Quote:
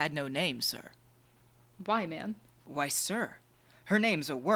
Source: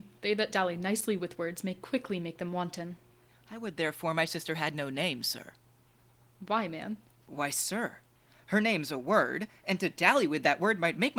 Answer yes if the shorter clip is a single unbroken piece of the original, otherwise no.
yes